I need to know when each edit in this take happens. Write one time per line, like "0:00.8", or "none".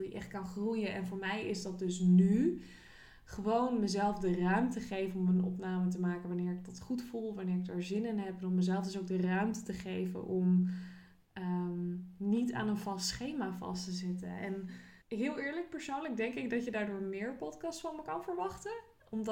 0:15.0